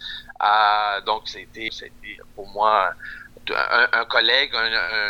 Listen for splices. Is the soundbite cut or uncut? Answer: cut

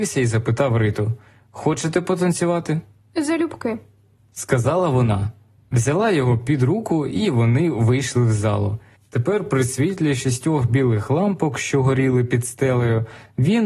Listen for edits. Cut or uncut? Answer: cut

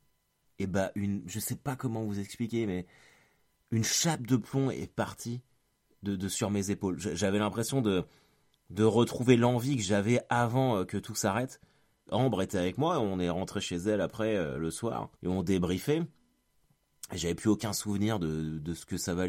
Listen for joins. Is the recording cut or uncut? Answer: cut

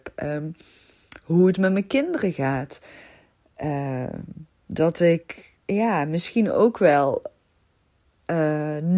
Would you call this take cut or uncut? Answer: cut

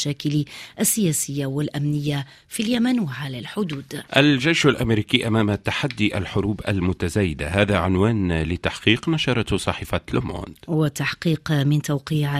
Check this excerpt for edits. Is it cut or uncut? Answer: cut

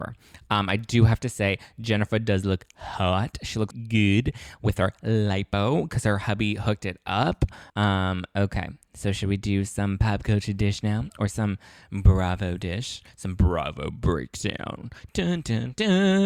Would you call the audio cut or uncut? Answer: cut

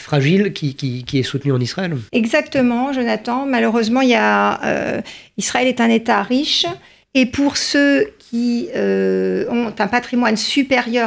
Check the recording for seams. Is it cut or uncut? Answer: cut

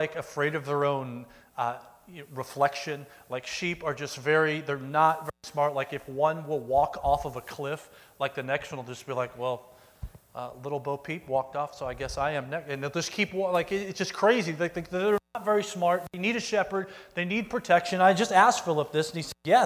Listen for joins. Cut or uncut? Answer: uncut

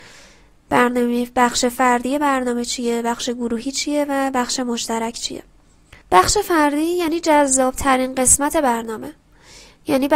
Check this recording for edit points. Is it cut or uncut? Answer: cut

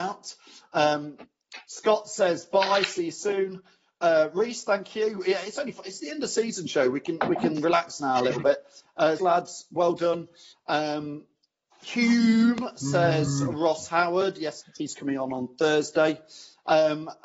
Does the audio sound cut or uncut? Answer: cut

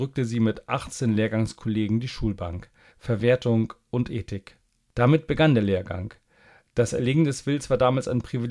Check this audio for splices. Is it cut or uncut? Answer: cut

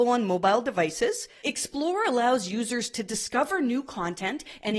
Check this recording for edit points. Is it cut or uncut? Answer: cut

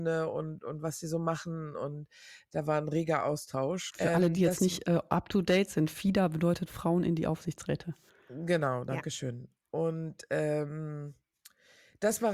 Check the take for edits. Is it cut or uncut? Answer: cut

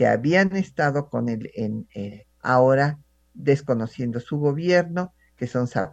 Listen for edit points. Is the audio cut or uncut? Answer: cut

